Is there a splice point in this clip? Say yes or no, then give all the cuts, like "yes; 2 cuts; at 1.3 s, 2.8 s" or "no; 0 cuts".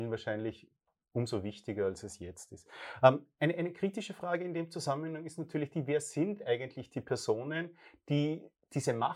no; 0 cuts